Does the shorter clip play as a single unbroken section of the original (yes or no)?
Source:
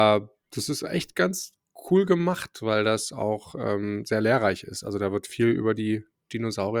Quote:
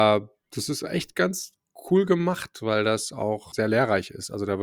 no